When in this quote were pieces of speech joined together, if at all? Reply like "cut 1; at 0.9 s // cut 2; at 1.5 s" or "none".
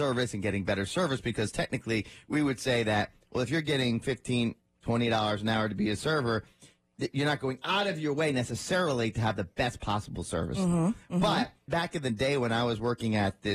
cut 1; at 11.7 s

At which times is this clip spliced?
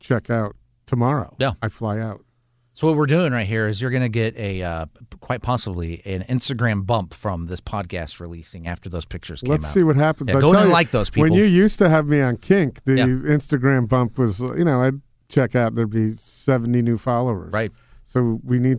none

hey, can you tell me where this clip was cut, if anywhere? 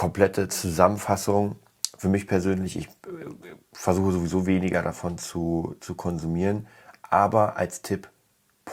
none

